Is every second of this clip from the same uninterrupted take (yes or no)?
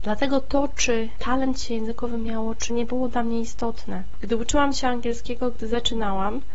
no